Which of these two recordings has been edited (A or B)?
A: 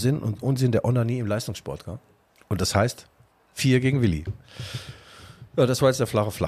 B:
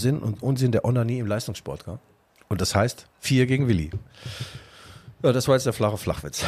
B